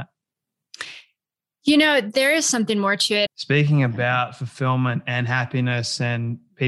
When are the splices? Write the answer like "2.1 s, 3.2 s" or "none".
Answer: 3.3 s

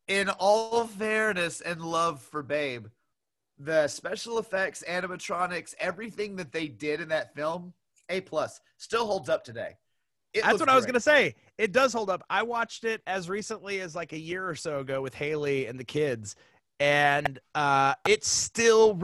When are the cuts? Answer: none

